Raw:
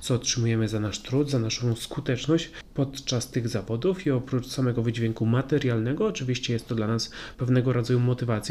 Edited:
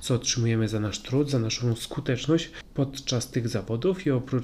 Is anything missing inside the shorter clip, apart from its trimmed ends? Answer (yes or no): no